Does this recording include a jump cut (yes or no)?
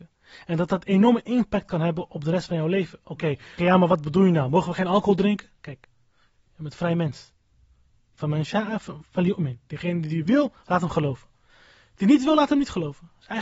yes